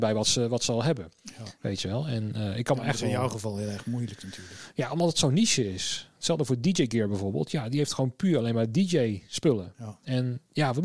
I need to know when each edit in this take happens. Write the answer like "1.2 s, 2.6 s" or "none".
none